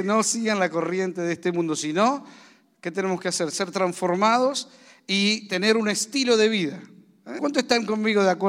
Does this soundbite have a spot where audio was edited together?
yes; 1 cut; at 7.4 s

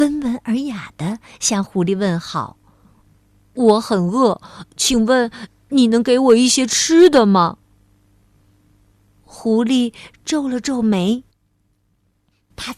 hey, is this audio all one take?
yes; 0 cuts

